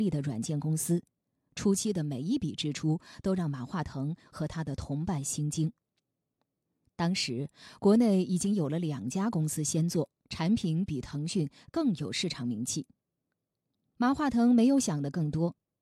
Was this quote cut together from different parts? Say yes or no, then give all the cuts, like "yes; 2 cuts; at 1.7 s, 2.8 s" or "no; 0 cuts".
yes; 2 cuts; at 6.8 s, 10.2 s